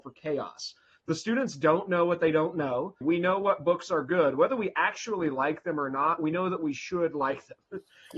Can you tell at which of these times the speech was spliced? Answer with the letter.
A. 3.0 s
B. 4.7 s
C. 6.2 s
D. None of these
A